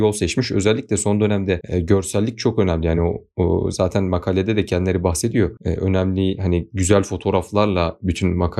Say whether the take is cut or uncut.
uncut